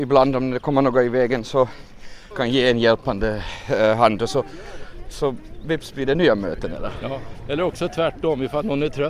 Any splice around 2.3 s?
yes; 1 cut; at 2.3 s

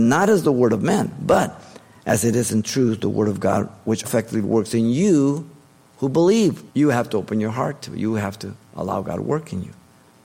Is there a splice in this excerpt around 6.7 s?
yes; 2 cuts; at 4.0 s, 6.7 s

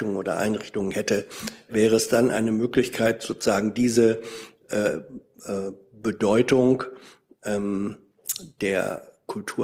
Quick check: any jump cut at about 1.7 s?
yes; 1 cut; at 1.7 s

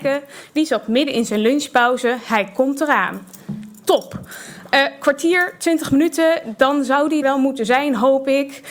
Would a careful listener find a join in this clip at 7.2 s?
yes; 1 cut; at 7.2 s

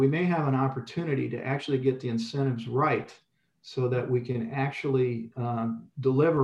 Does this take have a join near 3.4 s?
no; 0 cuts

